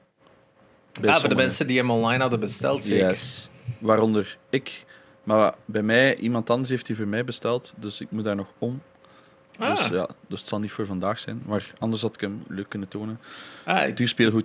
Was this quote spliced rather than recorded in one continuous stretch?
no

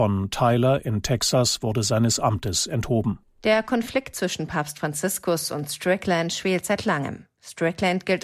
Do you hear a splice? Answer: yes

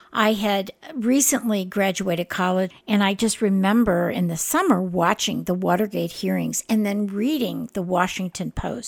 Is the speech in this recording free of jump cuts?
no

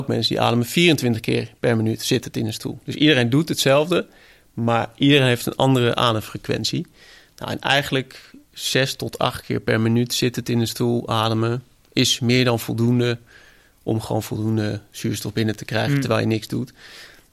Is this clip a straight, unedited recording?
yes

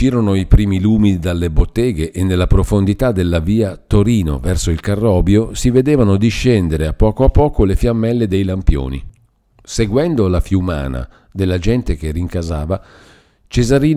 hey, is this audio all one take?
yes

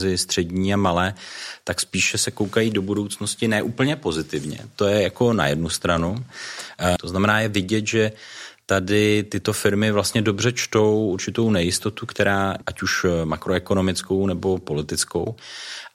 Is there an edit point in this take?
yes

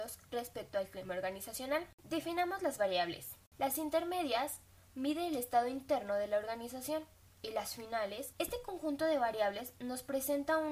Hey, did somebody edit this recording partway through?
yes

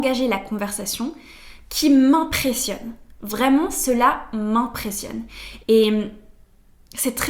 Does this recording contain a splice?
yes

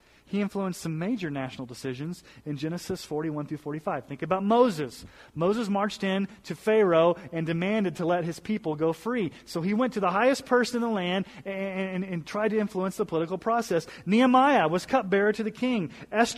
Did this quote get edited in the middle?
no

